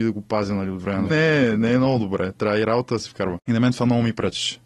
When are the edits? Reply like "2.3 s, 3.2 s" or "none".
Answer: 1.1 s